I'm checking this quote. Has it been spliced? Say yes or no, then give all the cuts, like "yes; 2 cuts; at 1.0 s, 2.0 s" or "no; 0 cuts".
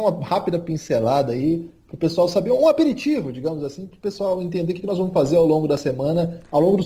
no; 0 cuts